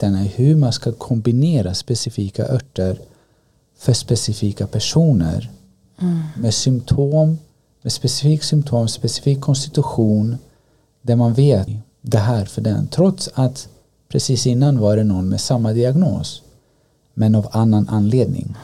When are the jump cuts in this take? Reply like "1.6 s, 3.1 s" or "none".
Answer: 11.7 s